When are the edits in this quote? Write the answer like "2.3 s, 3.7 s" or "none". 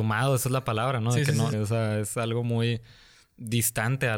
1.5 s